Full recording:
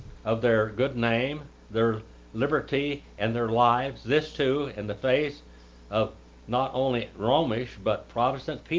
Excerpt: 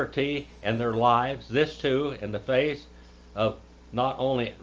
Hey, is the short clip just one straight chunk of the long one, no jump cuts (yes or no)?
yes